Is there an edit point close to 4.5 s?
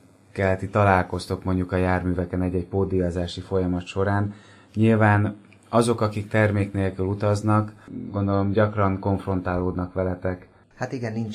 no; 0 cuts

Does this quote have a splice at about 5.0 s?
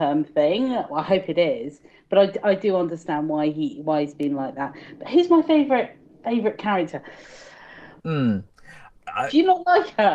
no; 1 cut; at 8.0 s

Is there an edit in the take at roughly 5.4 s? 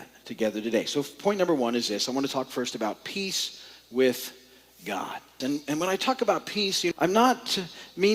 yes; 2 cuts; at 5.4 s, 6.9 s

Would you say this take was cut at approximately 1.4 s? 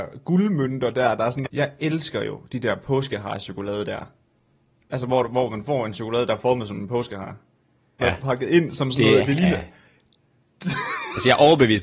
yes; 2 cuts; at 1.4 s, 8.0 s

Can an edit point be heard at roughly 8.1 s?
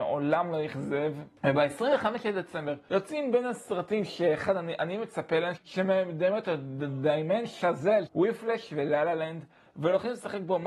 yes; 2 cuts; at 5.6 s, 8.1 s

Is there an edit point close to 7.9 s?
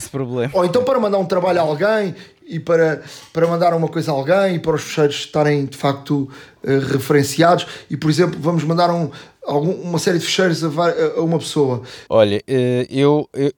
no; 1 cut; at 12.1 s

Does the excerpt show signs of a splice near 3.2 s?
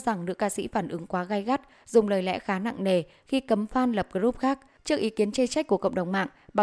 no; 1 cut; at 4.8 s

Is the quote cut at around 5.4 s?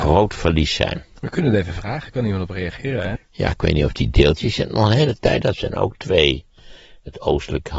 yes; 2 cuts; at 3.2 s, 5.4 s

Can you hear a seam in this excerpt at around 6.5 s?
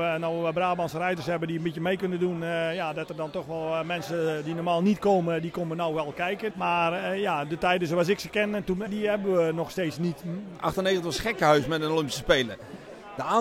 yes; 3 cuts; at 6.5 s, 8.9 s, 10.6 s

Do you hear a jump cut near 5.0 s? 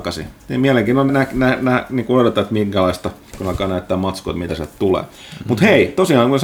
no; 1 cut; at 1.1 s

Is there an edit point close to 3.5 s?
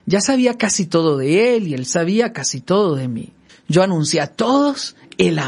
yes; 1 cut; at 3.5 s

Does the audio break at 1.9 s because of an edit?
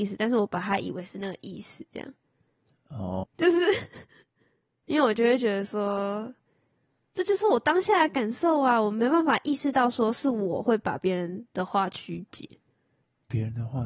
no; 1 cut; at 3.2 s

